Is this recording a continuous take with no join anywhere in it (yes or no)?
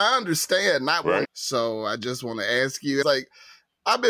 no